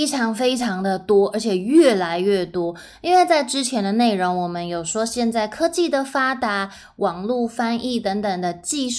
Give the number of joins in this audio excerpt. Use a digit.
0